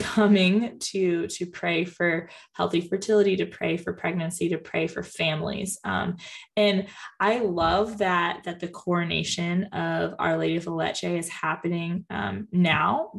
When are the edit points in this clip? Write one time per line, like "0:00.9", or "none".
none